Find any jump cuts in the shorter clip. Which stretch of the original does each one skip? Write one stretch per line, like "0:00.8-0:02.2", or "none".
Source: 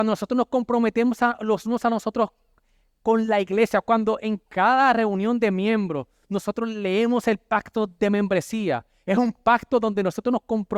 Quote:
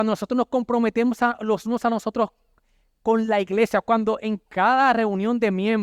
none